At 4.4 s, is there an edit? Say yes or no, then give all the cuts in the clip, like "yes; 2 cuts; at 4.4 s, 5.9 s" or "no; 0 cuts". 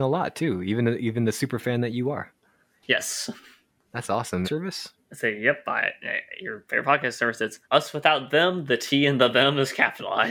yes; 2 cuts; at 4.4 s, 7.6 s